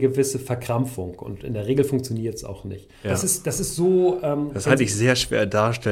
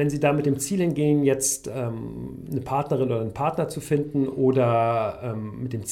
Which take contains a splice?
first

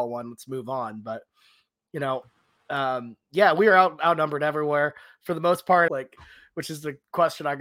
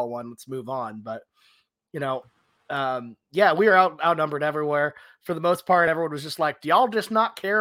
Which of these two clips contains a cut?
first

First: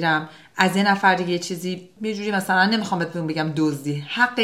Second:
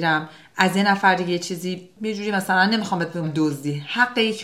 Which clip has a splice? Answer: second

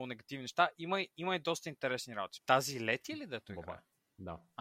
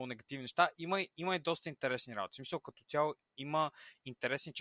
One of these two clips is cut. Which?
first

